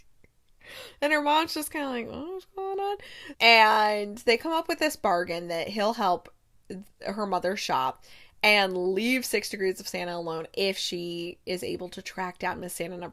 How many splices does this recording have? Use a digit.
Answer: 1